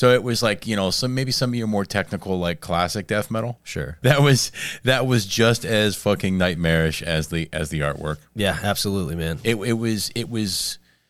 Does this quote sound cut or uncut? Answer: cut